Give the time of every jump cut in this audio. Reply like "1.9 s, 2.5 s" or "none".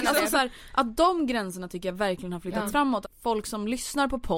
3.0 s